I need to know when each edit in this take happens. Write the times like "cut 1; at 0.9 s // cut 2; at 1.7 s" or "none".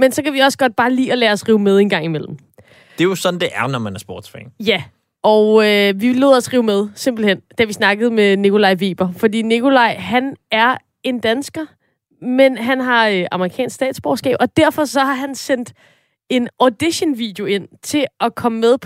none